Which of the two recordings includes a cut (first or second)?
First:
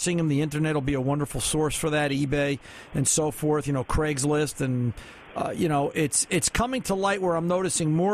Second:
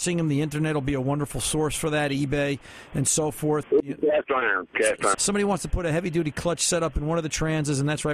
second